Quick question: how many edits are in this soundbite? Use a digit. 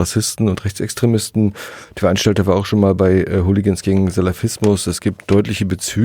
0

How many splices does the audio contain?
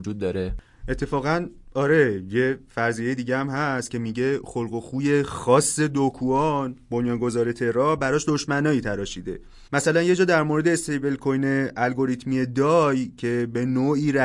1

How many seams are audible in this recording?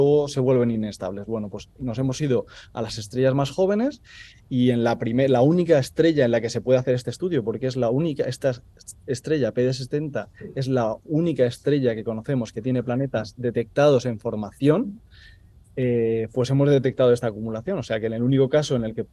0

